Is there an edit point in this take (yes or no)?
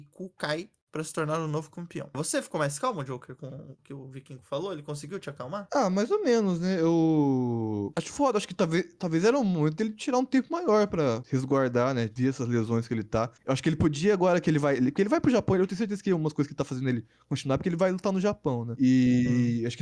yes